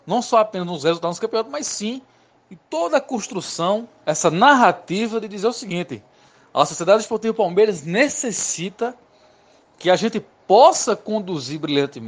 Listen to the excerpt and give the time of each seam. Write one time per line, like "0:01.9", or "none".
none